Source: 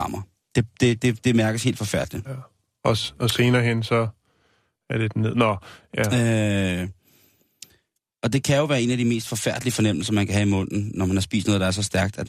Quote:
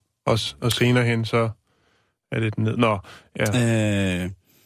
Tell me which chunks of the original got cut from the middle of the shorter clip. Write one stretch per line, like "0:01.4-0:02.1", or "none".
none